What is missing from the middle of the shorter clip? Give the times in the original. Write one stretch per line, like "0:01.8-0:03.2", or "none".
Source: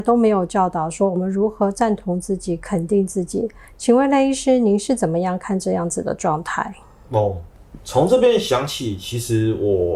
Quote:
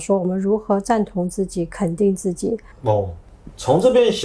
0:03.6-0:07.0